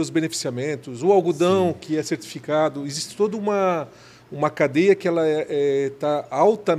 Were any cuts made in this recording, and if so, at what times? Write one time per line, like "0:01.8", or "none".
none